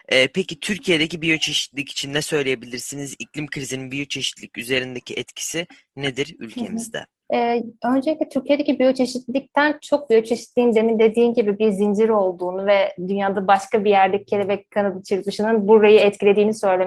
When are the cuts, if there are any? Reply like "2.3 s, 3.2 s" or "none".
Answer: 7.2 s